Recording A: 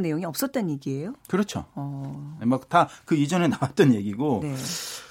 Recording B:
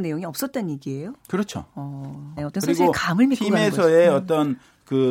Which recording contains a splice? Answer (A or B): B